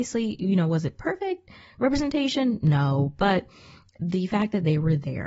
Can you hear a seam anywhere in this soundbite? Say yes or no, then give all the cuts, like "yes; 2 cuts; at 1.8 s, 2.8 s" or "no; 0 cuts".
no; 0 cuts